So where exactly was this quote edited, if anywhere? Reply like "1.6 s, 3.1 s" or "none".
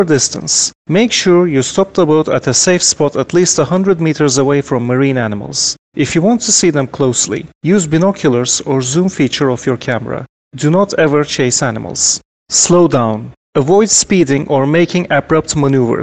none